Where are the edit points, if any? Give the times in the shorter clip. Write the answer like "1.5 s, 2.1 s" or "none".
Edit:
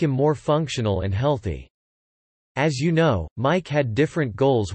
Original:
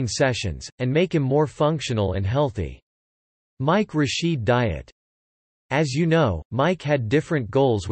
2.3 s